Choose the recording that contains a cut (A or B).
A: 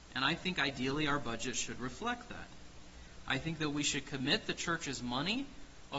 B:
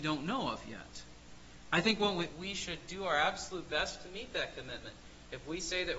B